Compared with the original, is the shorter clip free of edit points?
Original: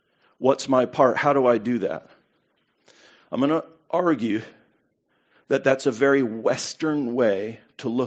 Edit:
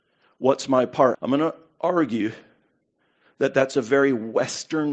no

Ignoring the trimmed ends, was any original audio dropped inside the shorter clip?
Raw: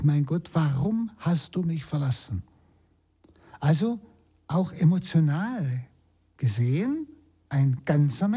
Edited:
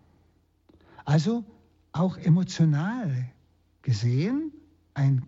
no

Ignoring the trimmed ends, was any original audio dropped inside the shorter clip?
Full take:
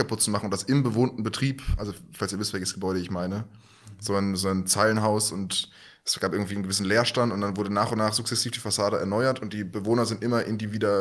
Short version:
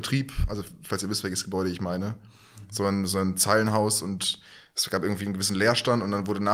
no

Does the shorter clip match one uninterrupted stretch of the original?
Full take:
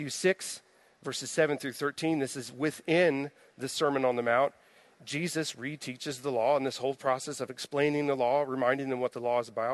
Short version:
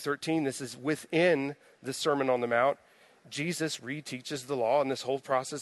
yes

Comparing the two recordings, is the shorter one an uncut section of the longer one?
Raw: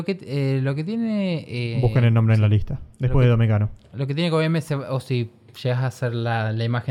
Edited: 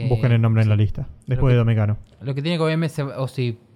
yes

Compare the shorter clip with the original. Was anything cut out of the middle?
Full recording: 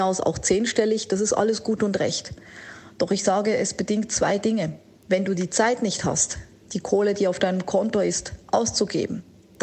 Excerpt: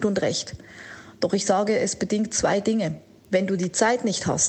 no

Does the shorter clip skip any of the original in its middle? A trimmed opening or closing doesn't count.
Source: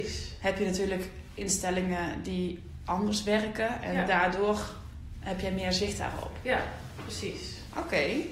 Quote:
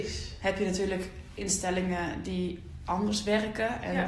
no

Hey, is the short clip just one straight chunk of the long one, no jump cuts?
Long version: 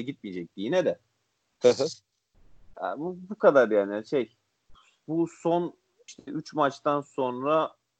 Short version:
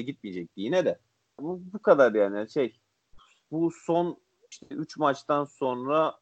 no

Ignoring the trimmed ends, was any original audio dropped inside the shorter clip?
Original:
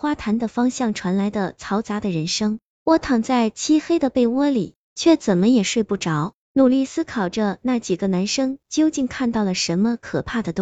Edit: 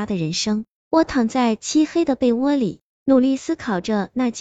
yes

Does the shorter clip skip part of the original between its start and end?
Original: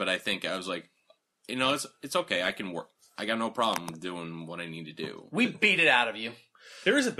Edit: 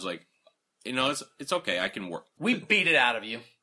yes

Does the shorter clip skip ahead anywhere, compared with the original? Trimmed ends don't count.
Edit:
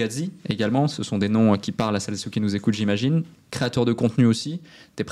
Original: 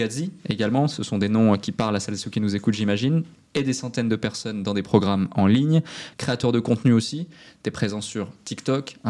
yes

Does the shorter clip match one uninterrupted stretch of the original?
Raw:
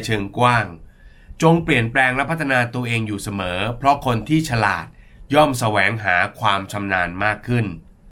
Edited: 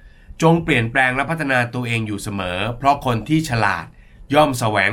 yes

